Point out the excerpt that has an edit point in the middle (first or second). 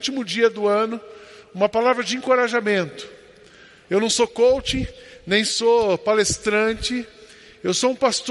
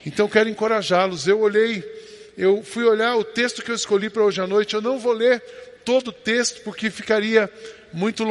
first